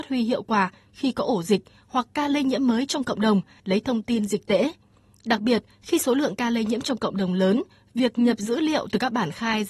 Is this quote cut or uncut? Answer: cut